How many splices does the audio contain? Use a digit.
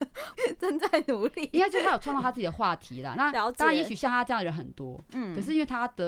0